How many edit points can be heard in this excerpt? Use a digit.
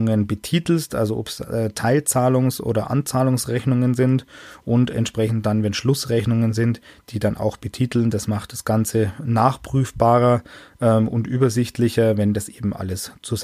0